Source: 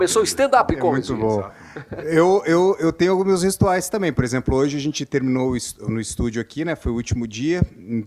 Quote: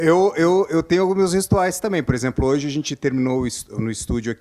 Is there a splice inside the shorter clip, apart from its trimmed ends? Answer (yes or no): no